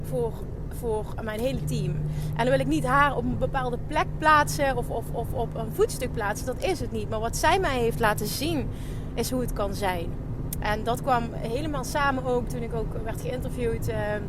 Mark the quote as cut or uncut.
uncut